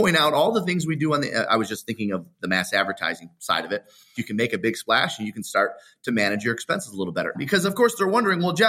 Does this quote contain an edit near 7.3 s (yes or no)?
yes